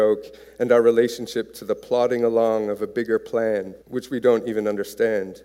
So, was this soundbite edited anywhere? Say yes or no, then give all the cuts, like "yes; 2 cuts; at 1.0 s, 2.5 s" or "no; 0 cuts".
yes; 1 cut; at 3.8 s